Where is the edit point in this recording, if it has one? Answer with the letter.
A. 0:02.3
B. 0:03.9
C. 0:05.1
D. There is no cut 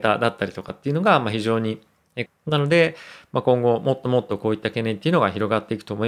A